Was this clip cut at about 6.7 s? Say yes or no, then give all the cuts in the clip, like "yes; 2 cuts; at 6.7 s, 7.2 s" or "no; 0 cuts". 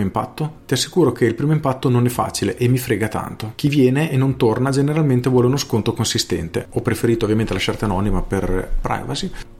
yes; 1 cut; at 6.7 s